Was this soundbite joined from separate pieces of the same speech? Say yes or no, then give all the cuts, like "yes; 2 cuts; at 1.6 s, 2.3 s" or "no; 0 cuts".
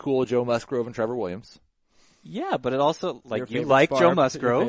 no; 0 cuts